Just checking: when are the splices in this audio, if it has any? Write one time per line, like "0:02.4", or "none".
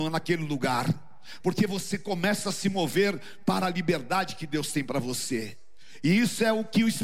0:01.4